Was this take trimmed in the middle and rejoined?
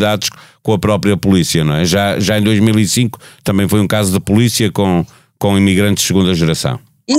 no; 0 cuts

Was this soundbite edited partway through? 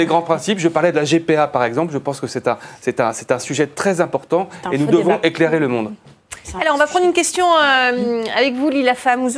no; 0 cuts

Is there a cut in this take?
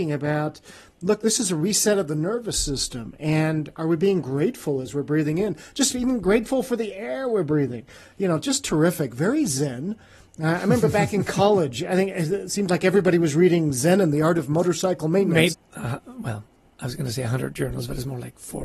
yes; 1 cut; at 15.5 s

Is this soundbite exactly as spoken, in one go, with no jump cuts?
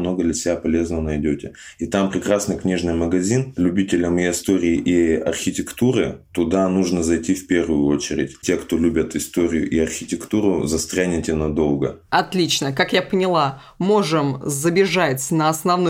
yes; 0 cuts

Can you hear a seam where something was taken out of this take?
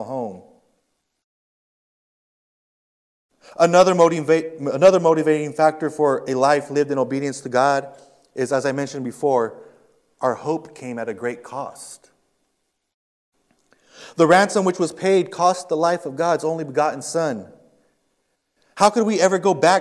no; 0 cuts

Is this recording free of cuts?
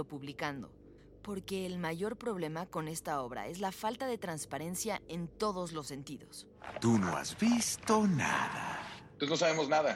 yes; 0 cuts

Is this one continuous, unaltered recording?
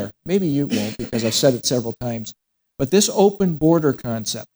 yes; 0 cuts

